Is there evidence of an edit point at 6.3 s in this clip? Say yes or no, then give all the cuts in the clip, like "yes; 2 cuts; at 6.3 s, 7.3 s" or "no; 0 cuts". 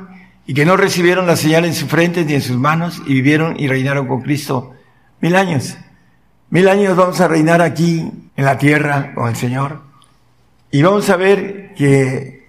no; 1 cut; at 8.3 s